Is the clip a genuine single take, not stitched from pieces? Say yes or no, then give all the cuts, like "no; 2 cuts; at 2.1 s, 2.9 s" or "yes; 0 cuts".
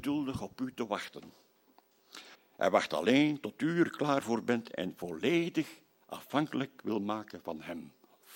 no; 1 cut; at 2.3 s